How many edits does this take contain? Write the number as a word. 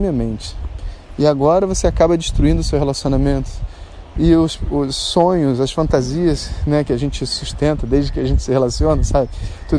one